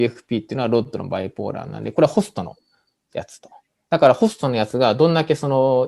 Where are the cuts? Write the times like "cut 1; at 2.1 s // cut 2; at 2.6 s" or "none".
none